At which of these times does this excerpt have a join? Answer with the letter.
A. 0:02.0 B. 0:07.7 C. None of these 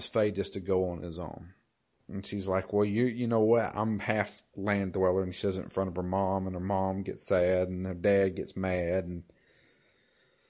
A